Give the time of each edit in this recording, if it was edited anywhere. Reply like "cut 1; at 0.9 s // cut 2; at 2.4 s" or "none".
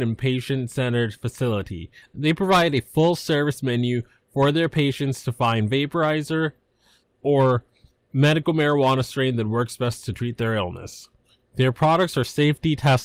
cut 1; at 2.0 s // cut 2; at 7.0 s